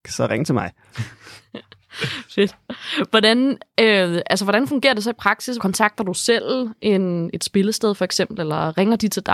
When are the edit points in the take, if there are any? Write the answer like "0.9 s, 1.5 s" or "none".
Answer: 5.6 s